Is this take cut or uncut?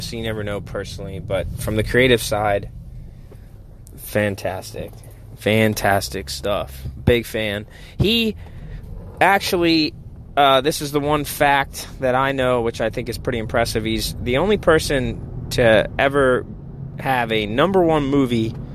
uncut